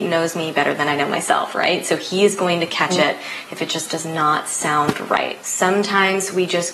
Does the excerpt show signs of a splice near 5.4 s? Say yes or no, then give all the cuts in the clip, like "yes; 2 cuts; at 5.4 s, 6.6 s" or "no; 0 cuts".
yes; 1 cut; at 5.4 s